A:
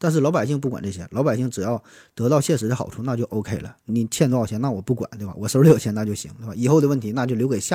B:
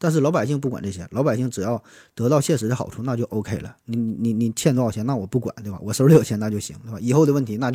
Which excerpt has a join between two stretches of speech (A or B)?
A